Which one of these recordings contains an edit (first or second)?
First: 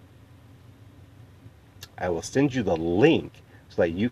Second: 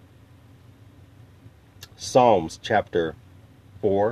first